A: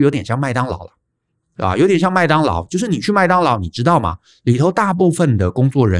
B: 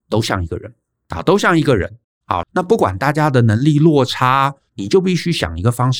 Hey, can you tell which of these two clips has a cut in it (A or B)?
B